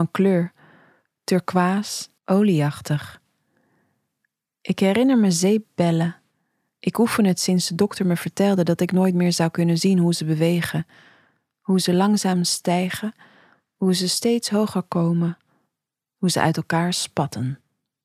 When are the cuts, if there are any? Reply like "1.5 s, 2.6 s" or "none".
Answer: 2.2 s